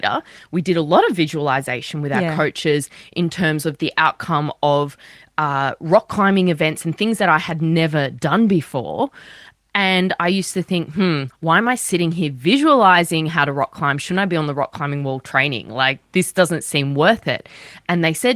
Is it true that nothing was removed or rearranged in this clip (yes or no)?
yes